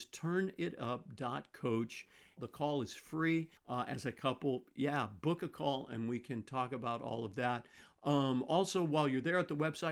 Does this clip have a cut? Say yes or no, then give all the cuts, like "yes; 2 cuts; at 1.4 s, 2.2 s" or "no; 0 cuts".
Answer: yes; 2 cuts; at 2.4 s, 3.6 s